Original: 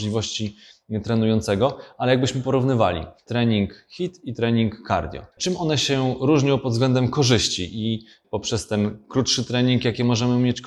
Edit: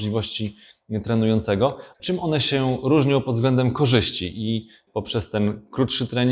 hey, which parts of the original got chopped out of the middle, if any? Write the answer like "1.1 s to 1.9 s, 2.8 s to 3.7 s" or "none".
1.9 s to 5.3 s